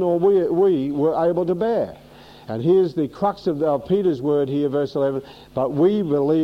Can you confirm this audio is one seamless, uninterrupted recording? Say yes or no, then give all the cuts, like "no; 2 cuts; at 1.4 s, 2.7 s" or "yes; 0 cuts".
yes; 0 cuts